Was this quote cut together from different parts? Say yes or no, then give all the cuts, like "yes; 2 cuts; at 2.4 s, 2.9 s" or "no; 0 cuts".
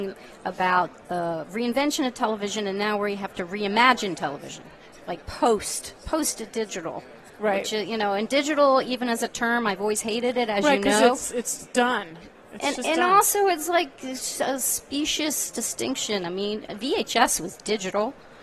no; 0 cuts